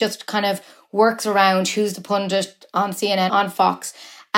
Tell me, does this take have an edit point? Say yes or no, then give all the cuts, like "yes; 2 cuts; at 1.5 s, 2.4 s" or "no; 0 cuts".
yes; 1 cut; at 3.3 s